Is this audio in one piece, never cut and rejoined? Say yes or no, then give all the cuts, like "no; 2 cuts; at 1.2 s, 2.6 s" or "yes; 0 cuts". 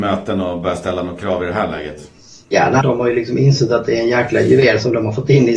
no; 1 cut; at 2.8 s